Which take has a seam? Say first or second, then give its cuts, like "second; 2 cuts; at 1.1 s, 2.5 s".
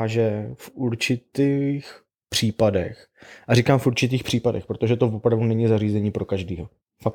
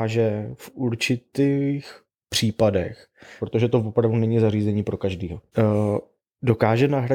second; 2 cuts; at 3.4 s, 5.5 s